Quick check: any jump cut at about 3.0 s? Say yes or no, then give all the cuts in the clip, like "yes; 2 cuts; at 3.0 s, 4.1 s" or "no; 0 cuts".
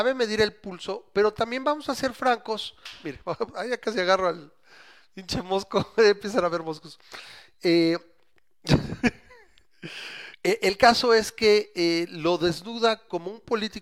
no; 1 cut; at 10.3 s